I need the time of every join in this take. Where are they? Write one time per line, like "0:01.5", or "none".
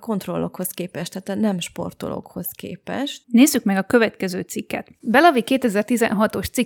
0:03.2